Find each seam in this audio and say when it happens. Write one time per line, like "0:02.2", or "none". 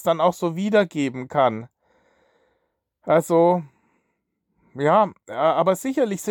none

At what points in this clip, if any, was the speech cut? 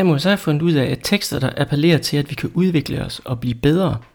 none

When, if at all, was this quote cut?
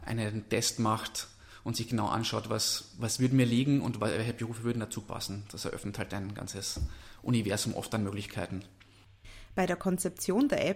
none

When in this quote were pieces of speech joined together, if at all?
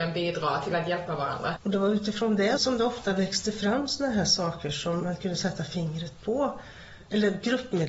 0:01.6
0:02.6

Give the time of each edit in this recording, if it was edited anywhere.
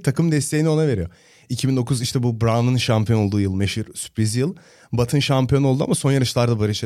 none

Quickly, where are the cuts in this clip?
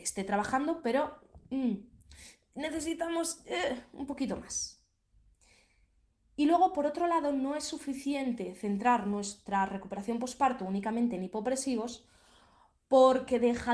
none

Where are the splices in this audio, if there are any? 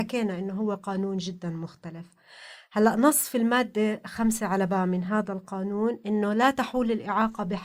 none

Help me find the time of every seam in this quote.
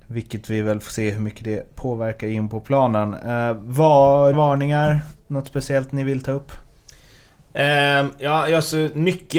0:04.3

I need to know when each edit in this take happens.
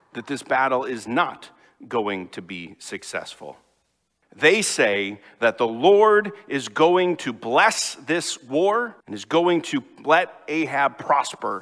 0:04.2
0:09.0

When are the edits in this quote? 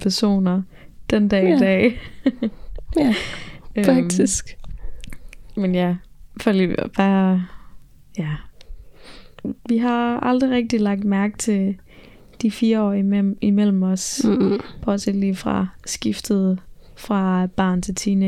0:09.6

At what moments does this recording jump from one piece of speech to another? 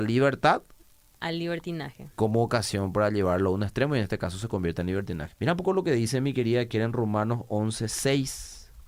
0:05.3

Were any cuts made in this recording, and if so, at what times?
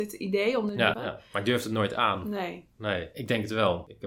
0:00.9

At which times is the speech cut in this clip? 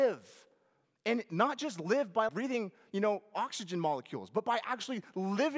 0:02.3

